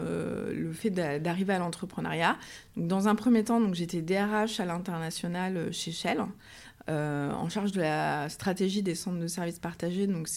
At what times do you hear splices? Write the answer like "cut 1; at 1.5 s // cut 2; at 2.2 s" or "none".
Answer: none